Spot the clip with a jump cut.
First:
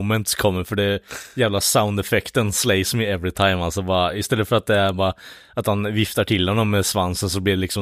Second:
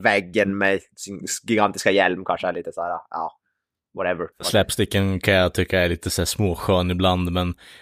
second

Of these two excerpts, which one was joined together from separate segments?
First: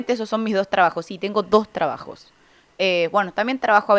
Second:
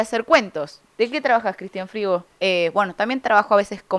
second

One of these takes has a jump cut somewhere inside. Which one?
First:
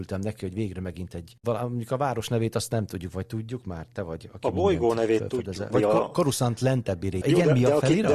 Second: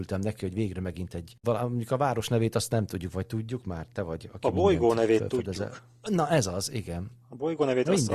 first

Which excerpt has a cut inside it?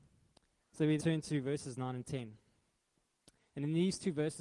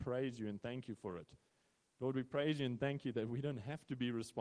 first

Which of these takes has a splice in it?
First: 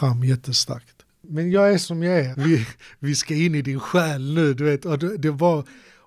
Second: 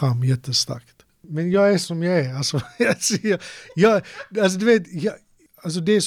first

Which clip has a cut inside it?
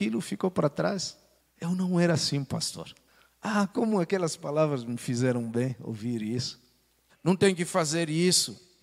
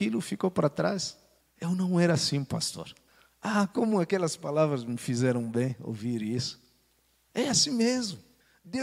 first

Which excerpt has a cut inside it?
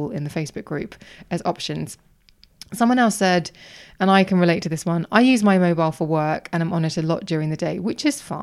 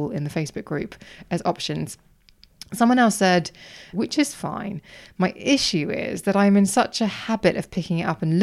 second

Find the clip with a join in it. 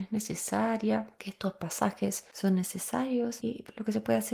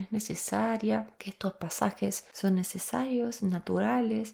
first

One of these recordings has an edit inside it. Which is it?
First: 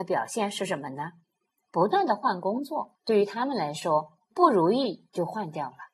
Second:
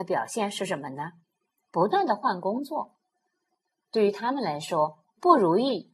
first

